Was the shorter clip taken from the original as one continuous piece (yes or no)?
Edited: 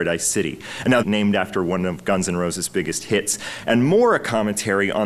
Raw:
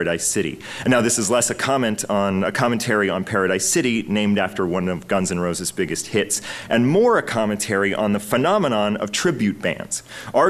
no